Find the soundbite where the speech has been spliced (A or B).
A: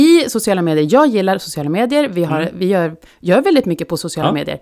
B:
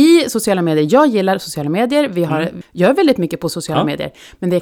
B